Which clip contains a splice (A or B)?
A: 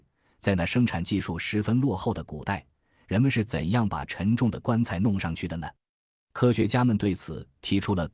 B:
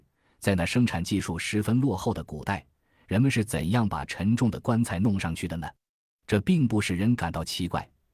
B